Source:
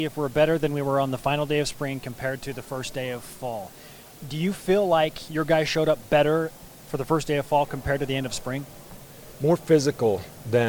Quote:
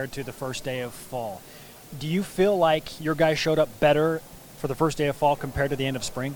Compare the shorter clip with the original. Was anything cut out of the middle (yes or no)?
no